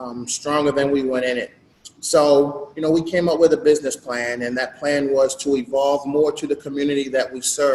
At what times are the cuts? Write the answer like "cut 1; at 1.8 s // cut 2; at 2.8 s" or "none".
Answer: none